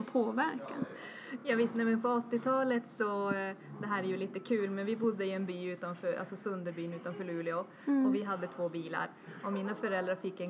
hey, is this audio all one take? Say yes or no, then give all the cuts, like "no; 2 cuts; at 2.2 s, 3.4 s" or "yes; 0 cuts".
yes; 0 cuts